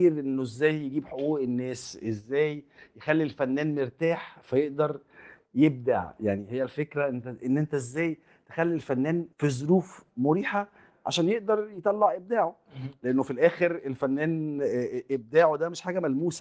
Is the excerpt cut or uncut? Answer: cut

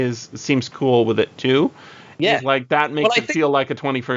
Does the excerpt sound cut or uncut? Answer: uncut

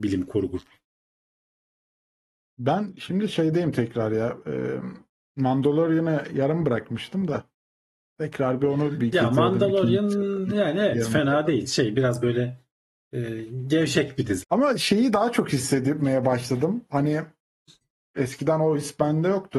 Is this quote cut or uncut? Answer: cut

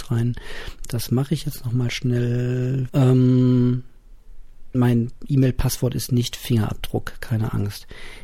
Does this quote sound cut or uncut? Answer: cut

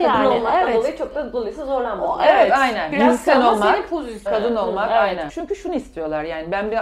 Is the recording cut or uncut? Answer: cut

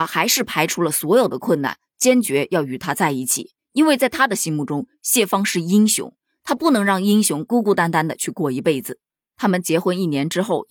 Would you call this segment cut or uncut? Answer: uncut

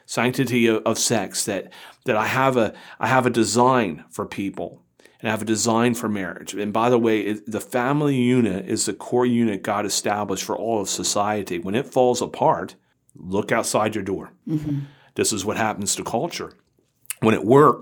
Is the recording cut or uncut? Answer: cut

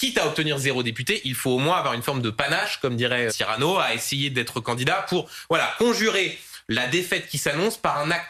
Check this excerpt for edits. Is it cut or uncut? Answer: cut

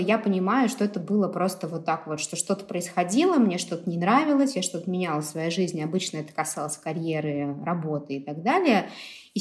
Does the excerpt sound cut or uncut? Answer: uncut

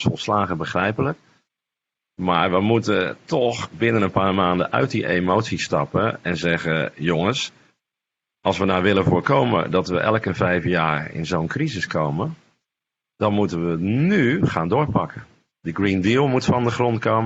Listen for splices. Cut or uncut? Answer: uncut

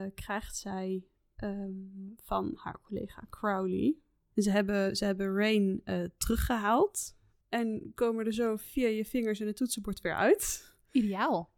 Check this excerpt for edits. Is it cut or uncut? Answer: cut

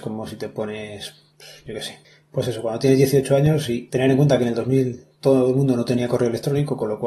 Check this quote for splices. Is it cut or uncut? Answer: cut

